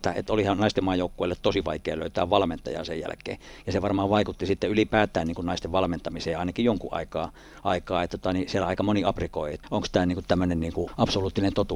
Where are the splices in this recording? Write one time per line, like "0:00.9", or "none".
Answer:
none